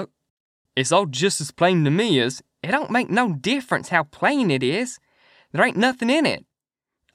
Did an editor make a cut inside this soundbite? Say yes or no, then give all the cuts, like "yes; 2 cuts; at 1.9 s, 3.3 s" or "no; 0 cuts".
no; 0 cuts